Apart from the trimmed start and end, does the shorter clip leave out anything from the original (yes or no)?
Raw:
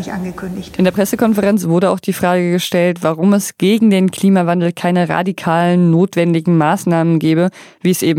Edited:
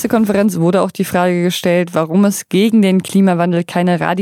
no